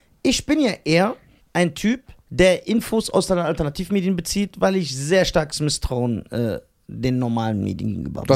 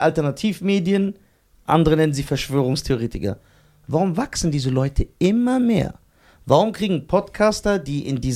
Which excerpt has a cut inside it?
first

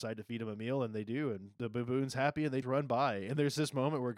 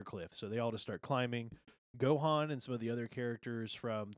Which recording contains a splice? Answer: first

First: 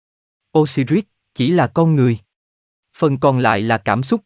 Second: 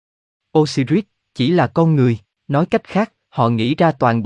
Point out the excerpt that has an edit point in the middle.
second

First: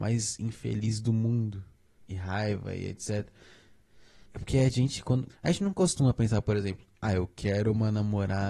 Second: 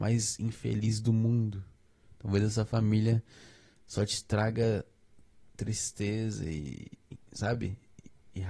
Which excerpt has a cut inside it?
first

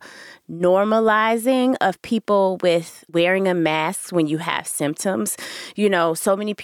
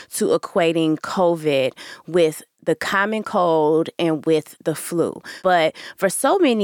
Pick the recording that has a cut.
first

